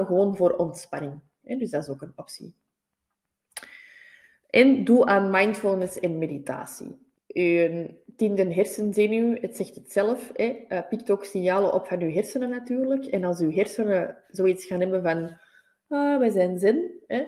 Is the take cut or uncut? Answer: cut